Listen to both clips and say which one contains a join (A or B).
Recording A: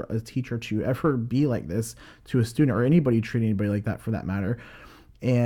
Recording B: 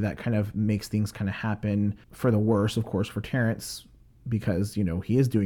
B